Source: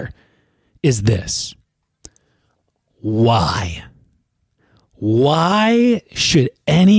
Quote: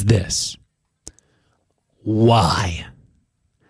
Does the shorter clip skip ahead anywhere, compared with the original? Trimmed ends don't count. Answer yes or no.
no